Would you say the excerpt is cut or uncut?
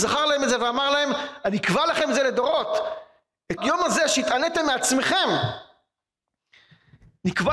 cut